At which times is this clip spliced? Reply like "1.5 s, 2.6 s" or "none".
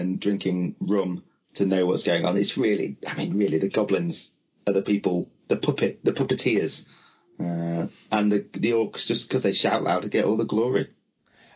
none